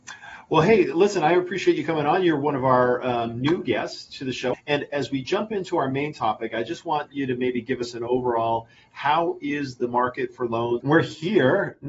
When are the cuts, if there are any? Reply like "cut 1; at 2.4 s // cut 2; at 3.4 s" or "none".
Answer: cut 1; at 4.5 s // cut 2; at 10.8 s